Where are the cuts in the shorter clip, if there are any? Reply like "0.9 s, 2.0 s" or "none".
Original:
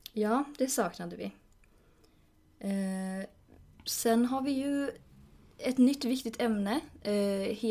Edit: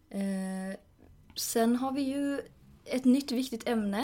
2.8 s